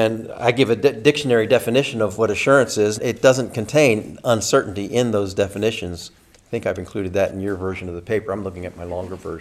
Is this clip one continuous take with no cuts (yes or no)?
no